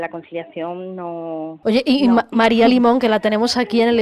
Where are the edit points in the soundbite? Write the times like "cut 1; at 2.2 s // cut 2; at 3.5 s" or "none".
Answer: cut 1; at 1.6 s